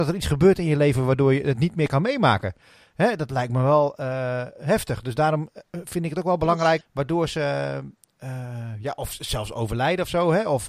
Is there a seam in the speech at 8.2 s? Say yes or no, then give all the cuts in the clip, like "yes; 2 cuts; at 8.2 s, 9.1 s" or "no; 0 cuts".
no; 1 cut; at 6.8 s